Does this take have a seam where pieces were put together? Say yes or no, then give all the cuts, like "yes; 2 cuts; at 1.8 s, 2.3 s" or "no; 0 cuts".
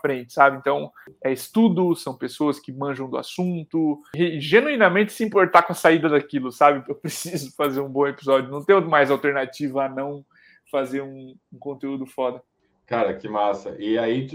yes; 1 cut; at 6.9 s